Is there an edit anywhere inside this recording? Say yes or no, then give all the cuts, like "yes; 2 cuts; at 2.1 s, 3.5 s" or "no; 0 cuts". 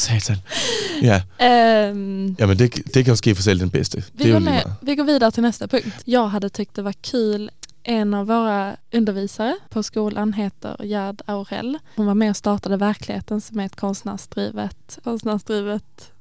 no; 0 cuts